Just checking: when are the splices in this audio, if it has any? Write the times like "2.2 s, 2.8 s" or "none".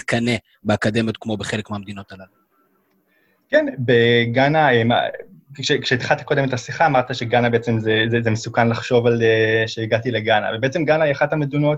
none